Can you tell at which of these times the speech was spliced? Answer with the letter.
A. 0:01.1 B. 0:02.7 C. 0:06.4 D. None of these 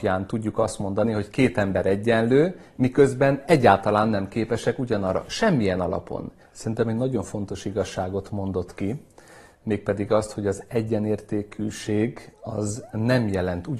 C